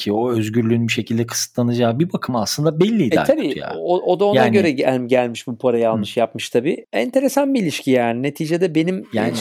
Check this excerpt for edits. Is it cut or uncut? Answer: uncut